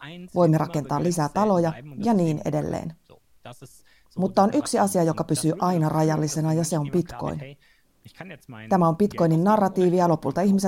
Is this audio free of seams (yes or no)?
yes